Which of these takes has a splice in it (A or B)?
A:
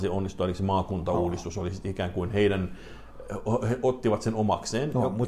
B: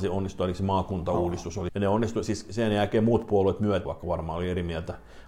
B